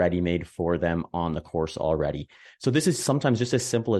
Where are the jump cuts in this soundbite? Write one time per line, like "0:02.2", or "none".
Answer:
0:02.5